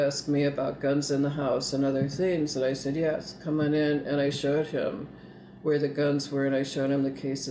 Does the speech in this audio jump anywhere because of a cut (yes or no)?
no